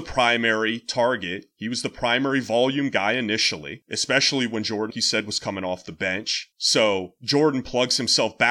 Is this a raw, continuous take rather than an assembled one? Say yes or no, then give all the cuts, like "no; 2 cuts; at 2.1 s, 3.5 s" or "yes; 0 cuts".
no; 2 cuts; at 4.9 s, 6.5 s